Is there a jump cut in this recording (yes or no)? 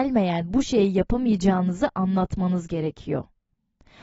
no